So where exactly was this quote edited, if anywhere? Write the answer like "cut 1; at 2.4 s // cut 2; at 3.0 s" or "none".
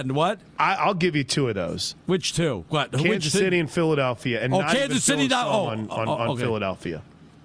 cut 1; at 2.0 s